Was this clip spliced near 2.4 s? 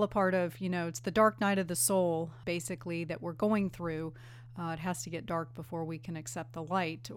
yes; 1 cut; at 2.4 s

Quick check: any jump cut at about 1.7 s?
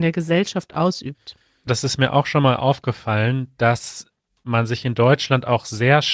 yes; 1 cut; at 1.7 s

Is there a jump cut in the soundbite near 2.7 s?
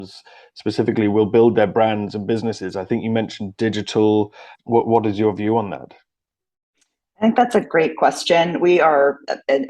no; 1 cut; at 4.5 s

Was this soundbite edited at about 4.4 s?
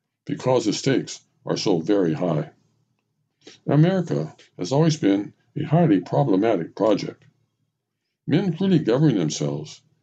yes; 1 cut; at 4.4 s

